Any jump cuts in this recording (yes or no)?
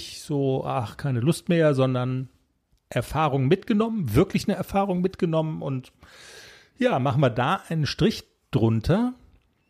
no